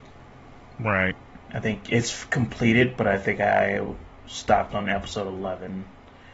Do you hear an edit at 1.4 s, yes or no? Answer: yes